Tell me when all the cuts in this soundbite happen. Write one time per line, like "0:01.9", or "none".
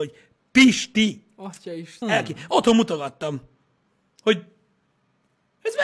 0:02.0

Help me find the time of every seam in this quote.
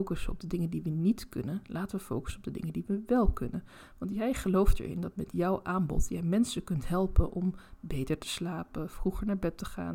none

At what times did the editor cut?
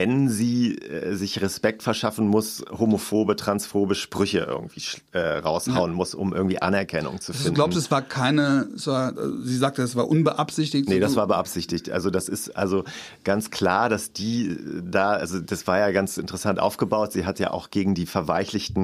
0:09.1

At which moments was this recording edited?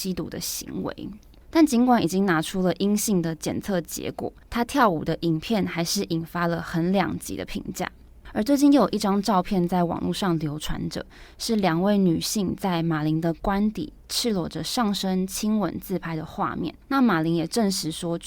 0:16.8

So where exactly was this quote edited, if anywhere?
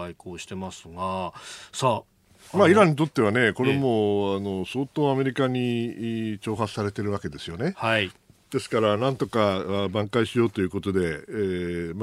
none

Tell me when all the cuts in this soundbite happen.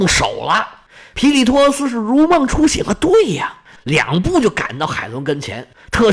0:03.8

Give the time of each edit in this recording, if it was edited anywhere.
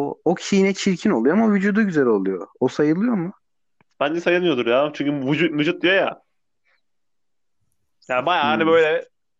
none

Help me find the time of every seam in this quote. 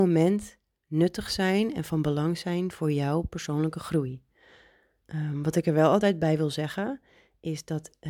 0:05.0

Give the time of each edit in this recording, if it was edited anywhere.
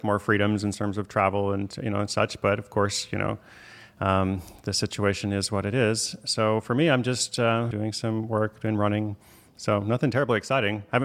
0:07.7

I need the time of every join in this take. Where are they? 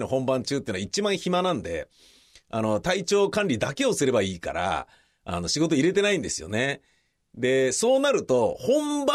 none

